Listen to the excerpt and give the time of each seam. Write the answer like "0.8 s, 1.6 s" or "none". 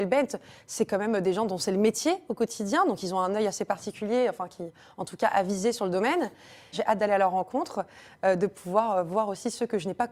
6.7 s